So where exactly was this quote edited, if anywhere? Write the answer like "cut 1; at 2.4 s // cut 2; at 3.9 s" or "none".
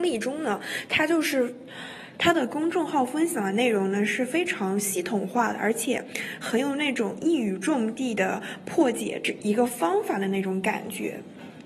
cut 1; at 2.1 s